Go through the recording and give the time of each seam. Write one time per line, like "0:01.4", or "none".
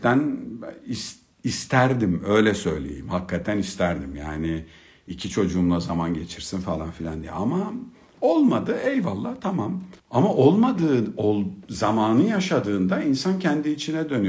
0:08.1
0:10.0